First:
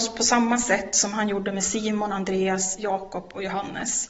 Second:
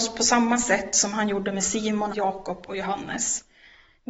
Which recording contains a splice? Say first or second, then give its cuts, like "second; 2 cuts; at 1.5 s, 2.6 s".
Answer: second; 1 cut; at 2.1 s